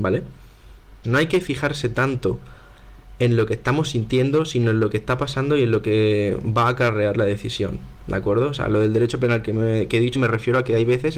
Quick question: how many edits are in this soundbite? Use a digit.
2